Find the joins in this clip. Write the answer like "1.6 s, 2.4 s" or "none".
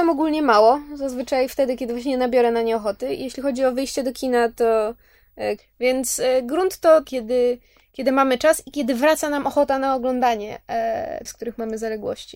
5.6 s, 7.0 s, 11.3 s